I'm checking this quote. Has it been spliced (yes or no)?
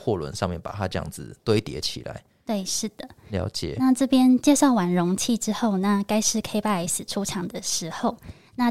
no